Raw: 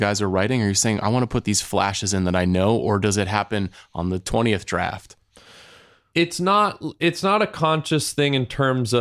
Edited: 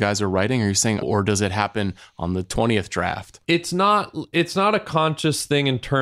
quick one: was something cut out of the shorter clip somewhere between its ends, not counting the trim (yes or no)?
yes